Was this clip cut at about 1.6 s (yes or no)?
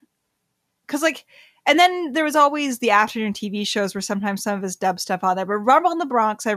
no